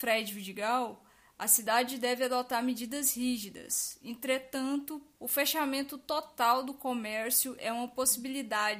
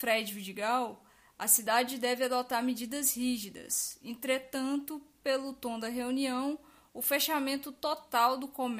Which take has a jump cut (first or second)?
first